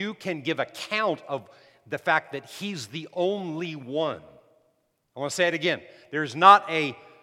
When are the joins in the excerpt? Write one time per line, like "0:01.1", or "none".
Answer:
0:05.0

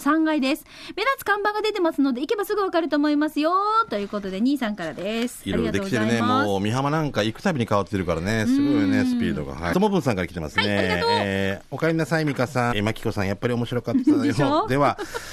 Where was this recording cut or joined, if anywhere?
0:09.7
0:12.7

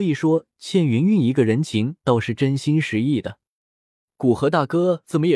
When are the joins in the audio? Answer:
none

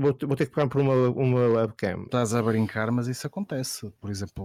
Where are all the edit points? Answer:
0:02.1

